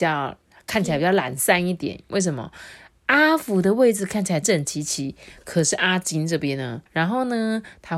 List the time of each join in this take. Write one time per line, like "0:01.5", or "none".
0:04.4
0:06.9